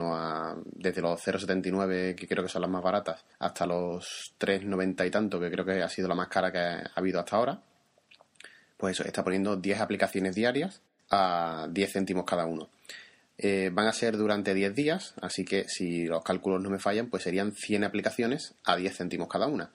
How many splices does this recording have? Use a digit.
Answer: 1